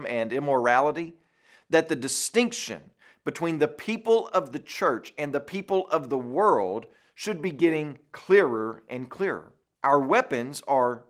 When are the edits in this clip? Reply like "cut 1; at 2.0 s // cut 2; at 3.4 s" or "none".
cut 1; at 9.7 s